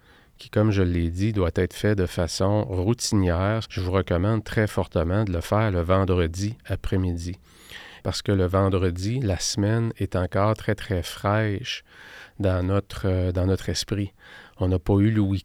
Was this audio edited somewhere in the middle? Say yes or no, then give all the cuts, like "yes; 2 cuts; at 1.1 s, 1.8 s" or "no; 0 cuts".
yes; 2 cuts; at 3.6 s, 8.0 s